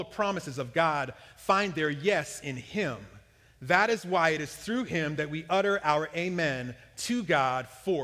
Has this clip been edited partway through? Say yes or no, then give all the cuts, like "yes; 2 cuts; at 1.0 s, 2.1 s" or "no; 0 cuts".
no; 0 cuts